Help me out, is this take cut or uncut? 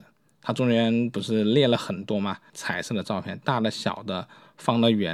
cut